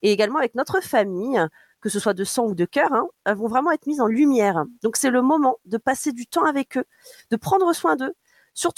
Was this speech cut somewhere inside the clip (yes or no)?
no